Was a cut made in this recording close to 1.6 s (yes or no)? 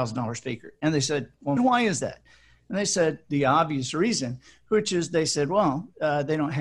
yes